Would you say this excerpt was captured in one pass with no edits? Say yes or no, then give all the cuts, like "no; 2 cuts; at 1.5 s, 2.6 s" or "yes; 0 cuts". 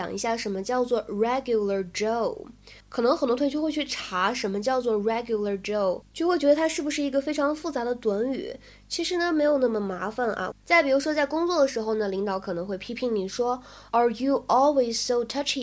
no; 2 cuts; at 2.8 s, 10.5 s